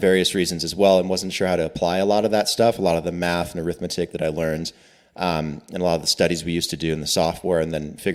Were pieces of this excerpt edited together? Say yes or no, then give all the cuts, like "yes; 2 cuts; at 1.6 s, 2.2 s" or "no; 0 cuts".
no; 0 cuts